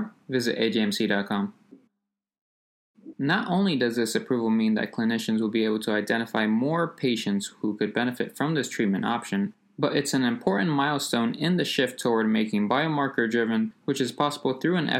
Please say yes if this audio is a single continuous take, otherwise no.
no